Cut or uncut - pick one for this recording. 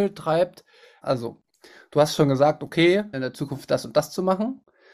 cut